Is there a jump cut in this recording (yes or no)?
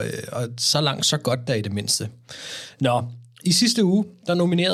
no